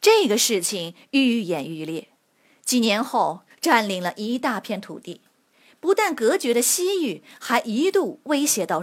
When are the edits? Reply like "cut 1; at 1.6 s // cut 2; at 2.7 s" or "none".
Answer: cut 1; at 3.5 s

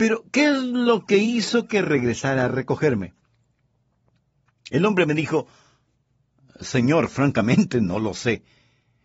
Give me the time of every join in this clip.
none

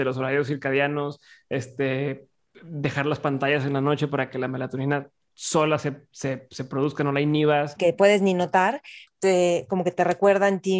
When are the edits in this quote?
cut 1; at 7.8 s // cut 2; at 9.1 s

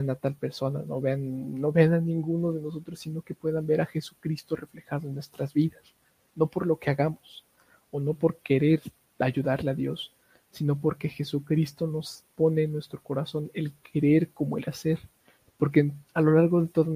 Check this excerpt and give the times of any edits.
cut 1; at 15.4 s

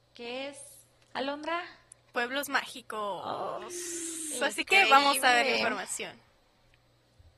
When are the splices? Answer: cut 1; at 3.6 s

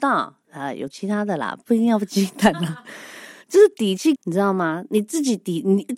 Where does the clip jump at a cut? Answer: cut 1; at 4.2 s

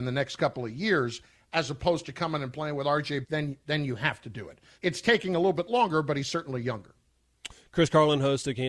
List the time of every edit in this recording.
cut 1; at 3.2 s // cut 2; at 4.8 s

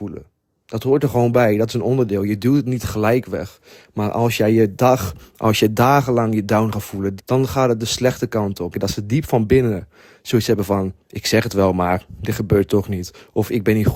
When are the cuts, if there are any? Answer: cut 1; at 7.2 s // cut 2; at 8.7 s

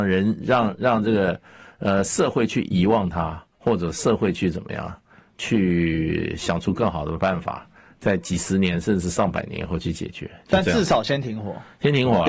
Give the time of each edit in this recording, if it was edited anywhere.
cut 1; at 3.5 s

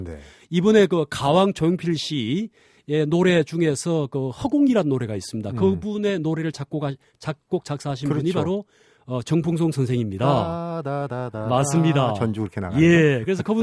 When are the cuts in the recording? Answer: none

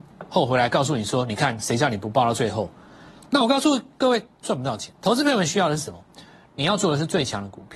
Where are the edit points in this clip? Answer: none

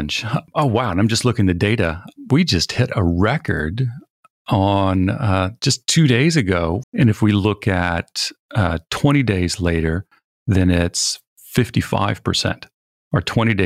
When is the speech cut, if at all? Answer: cut 1; at 6.8 s

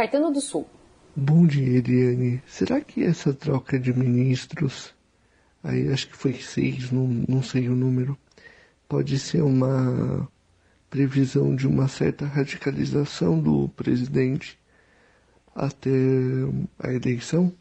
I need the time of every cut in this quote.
none

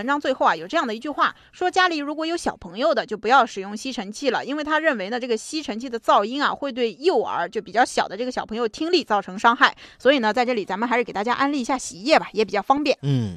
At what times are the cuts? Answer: none

